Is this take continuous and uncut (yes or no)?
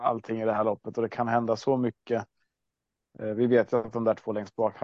yes